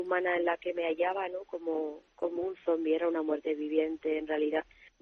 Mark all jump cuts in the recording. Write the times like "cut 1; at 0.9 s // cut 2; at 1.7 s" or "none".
none